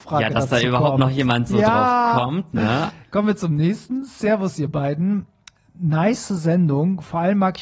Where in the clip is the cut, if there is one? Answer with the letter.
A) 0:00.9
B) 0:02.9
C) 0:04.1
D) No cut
B